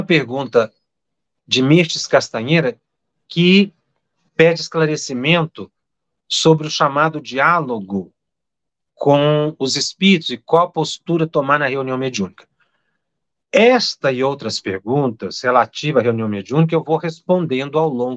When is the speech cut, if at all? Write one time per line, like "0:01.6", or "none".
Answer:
none